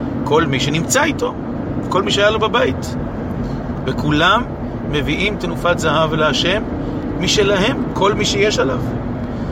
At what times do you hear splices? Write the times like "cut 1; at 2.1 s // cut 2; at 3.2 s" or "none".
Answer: cut 1; at 3.9 s